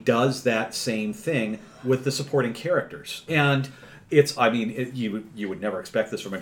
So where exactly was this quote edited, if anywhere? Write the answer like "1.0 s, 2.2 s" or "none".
3.3 s, 4.4 s